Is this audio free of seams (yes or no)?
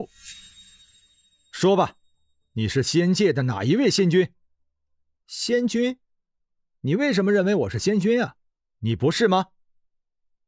no